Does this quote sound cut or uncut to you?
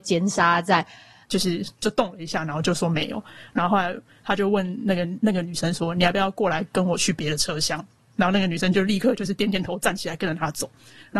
cut